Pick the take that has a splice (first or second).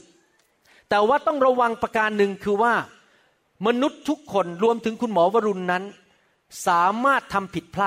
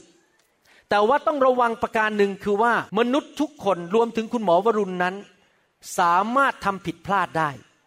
second